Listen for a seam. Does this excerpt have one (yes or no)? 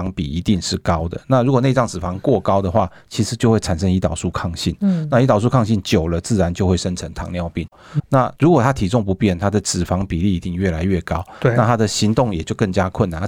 yes